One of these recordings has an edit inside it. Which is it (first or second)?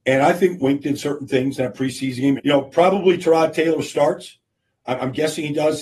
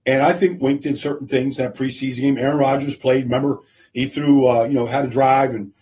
first